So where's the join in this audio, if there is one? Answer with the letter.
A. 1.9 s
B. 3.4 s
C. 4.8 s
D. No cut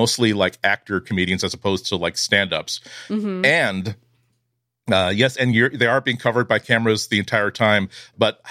D